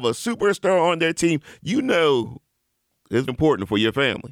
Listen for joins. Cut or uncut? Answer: cut